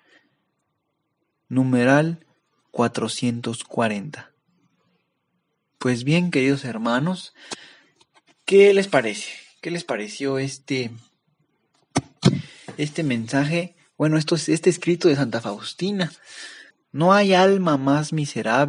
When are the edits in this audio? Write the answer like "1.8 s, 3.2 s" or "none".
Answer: 16.7 s